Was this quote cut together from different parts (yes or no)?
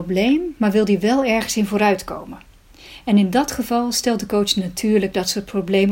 no